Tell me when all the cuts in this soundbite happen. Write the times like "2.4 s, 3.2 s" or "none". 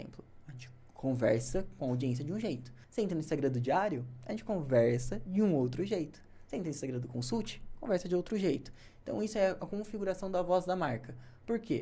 2.8 s